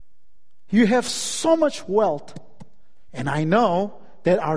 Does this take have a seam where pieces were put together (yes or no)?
yes